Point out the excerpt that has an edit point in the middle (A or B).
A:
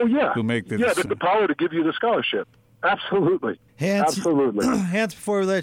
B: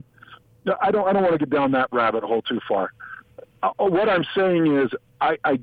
A